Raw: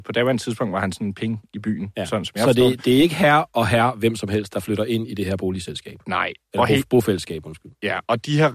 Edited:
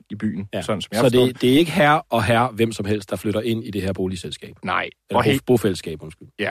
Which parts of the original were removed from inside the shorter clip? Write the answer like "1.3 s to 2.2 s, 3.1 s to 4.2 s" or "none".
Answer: none